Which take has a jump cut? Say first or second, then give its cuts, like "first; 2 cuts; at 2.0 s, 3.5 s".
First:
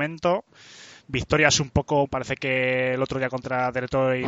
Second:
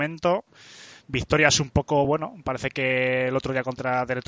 first; 1 cut; at 2.0 s